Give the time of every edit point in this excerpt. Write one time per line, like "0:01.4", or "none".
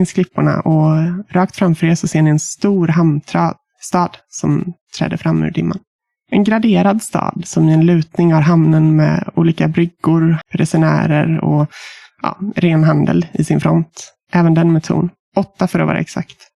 0:10.4
0:14.2